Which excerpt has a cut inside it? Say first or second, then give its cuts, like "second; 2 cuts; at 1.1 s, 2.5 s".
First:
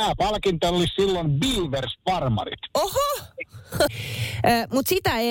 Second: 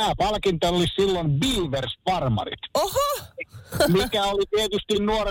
first; 1 cut; at 3.9 s